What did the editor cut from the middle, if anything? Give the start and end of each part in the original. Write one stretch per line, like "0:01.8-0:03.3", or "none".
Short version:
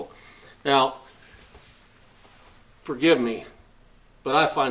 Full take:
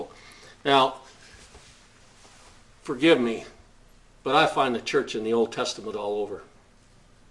none